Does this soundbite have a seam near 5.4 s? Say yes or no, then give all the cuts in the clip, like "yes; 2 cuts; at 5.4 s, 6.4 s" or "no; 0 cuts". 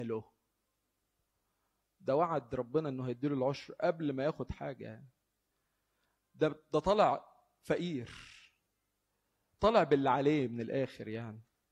no; 0 cuts